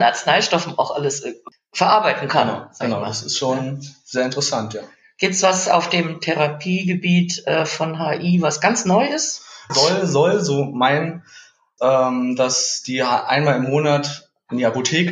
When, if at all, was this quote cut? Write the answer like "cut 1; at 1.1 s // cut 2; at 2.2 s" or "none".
cut 1; at 9.7 s // cut 2; at 11.8 s